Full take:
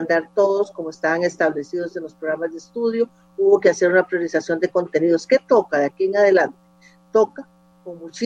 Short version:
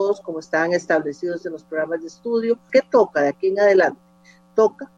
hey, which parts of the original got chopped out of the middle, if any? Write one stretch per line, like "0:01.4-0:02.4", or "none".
0:03.2-0:05.3